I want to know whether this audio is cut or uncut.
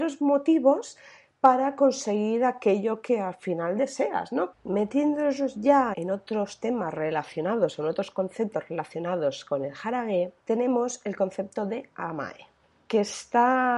cut